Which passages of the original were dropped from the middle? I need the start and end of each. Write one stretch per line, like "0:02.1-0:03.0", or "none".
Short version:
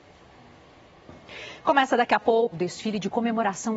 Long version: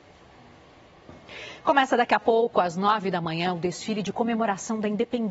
0:02.5-0:03.5